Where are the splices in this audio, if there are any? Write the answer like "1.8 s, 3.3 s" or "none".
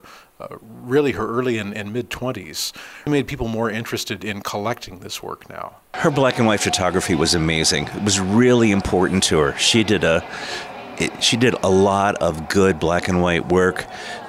3.1 s, 5.8 s